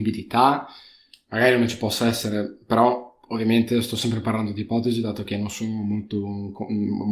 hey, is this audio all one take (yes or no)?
yes